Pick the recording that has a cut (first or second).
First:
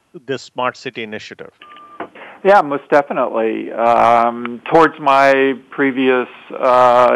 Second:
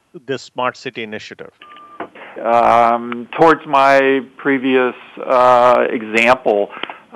second